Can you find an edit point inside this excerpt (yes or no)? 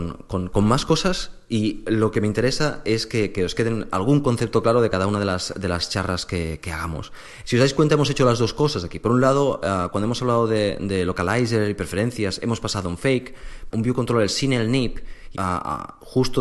yes